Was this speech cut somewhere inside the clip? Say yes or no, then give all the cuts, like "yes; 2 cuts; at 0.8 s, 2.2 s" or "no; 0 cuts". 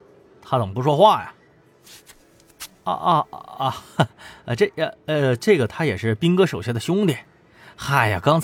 no; 0 cuts